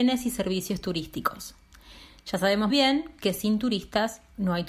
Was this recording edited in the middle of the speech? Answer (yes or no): yes